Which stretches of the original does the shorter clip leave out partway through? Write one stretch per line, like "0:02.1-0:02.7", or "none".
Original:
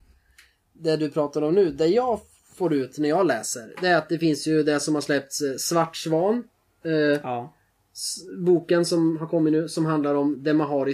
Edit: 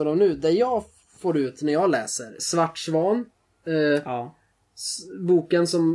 0:03.7-0:05.6